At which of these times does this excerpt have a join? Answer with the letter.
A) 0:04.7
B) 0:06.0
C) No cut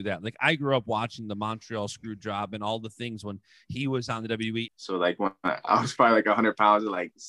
A